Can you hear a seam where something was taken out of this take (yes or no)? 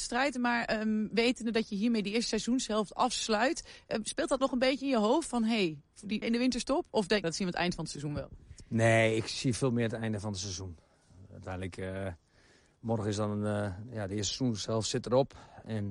yes